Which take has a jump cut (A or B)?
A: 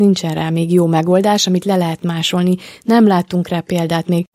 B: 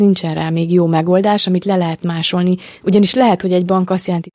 B